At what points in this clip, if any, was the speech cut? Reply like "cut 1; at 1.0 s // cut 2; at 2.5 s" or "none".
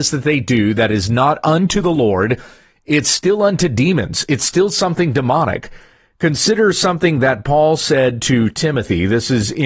none